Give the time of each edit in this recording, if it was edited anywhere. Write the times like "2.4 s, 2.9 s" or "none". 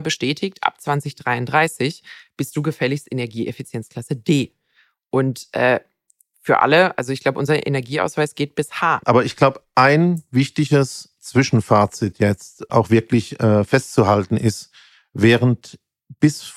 9.0 s, 12.7 s